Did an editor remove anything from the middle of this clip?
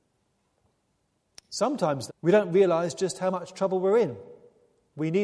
yes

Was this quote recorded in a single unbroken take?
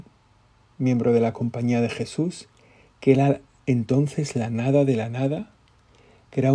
yes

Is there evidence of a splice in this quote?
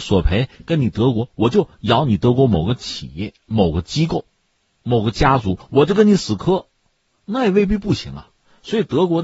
no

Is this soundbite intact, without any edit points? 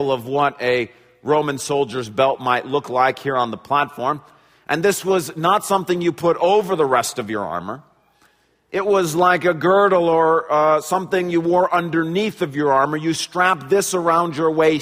yes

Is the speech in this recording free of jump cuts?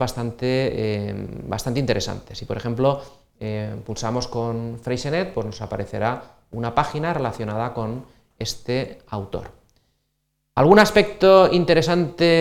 yes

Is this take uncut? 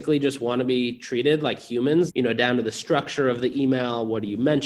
no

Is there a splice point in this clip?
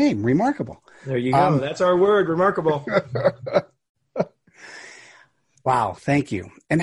no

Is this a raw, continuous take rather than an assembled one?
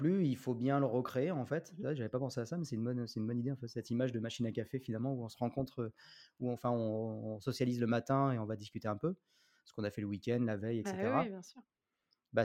yes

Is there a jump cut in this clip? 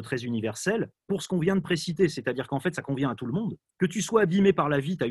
no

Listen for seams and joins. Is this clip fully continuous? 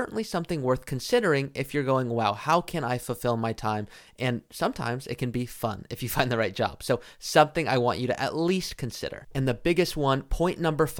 yes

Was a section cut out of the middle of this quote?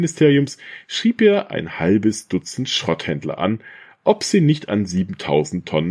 no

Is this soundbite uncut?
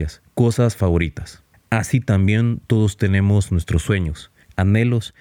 yes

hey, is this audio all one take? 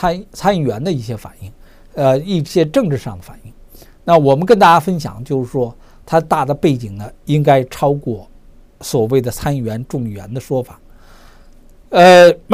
yes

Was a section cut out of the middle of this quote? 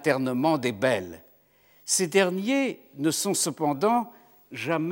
no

